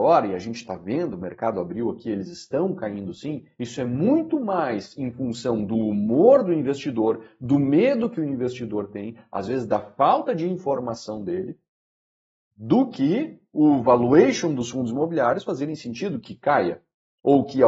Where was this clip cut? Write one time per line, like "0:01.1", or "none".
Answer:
none